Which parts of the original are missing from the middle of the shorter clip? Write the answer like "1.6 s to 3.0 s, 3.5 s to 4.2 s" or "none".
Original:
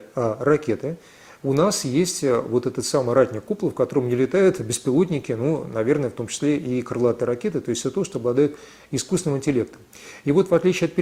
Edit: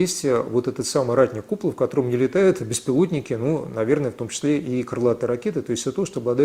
none